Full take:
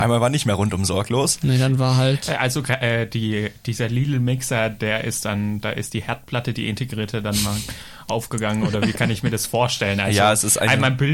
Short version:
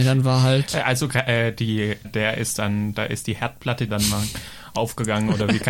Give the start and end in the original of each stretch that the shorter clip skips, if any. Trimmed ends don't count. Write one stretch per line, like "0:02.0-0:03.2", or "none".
0:03.6-0:04.7
0:06.5-0:07.2